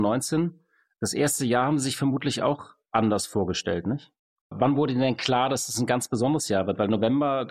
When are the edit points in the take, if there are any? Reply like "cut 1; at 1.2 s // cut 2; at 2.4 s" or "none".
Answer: none